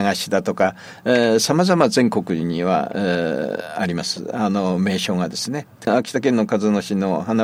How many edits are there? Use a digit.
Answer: 0